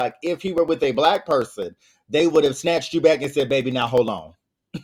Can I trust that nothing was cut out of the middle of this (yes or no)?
yes